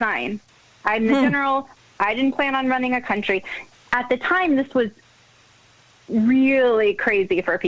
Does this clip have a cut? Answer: no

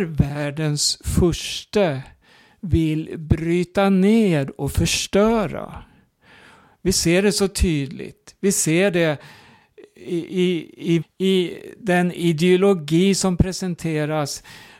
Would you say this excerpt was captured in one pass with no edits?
no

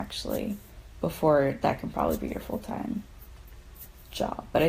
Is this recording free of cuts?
yes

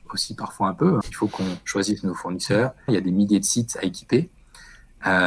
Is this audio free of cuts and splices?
no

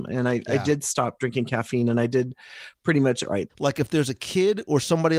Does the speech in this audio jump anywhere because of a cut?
yes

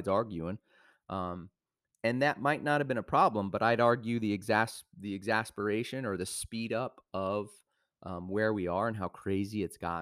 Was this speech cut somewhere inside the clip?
no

